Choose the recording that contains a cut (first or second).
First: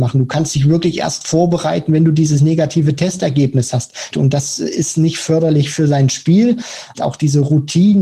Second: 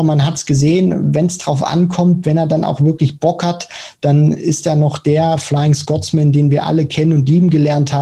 first